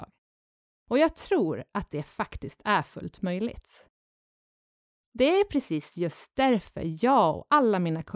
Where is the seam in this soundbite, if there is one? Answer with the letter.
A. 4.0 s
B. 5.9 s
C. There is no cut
C